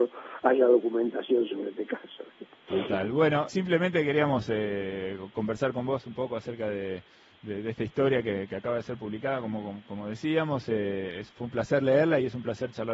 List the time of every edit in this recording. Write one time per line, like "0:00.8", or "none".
0:03.5